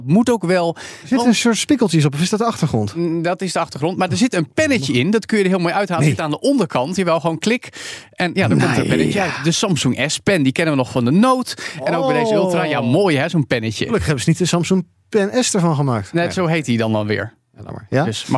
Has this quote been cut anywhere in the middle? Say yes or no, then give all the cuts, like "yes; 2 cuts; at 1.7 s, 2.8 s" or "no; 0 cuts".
no; 0 cuts